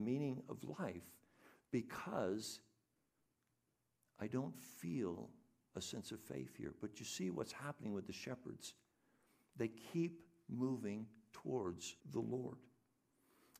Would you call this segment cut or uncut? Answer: cut